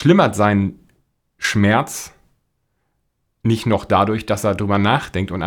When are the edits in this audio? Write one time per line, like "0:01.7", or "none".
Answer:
none